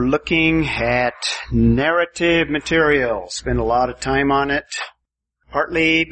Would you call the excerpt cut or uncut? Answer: uncut